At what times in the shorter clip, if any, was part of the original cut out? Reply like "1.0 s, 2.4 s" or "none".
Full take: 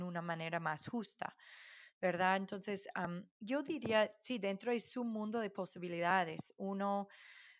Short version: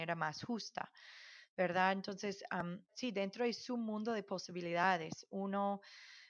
2.9 s